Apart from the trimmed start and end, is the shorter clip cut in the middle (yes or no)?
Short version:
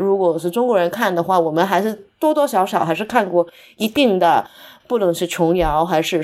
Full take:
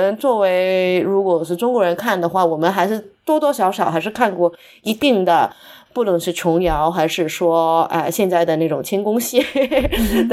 no